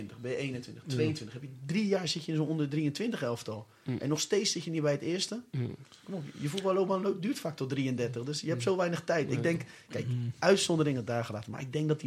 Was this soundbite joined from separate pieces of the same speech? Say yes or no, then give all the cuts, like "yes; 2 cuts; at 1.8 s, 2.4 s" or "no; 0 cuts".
no; 0 cuts